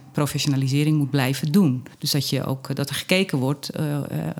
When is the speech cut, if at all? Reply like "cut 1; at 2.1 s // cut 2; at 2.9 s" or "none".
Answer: cut 1; at 1.9 s